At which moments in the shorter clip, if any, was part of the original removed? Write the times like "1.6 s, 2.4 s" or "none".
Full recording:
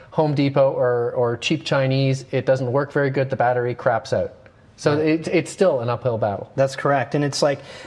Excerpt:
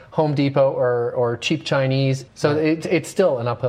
2.3 s